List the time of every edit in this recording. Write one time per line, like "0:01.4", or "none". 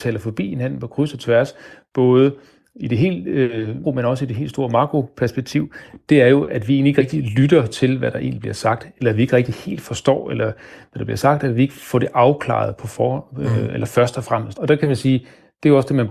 0:03.8
0:14.5